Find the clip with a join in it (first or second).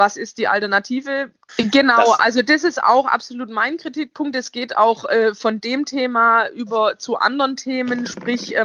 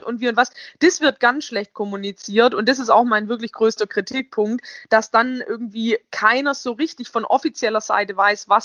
first